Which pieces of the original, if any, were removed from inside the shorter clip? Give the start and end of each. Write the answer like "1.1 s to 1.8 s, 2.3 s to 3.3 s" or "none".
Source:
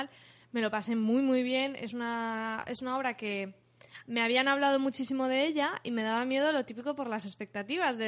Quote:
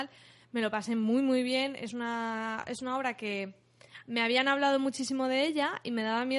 none